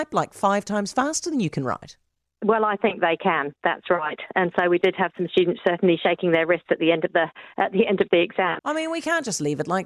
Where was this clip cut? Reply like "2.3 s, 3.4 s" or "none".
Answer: 8.6 s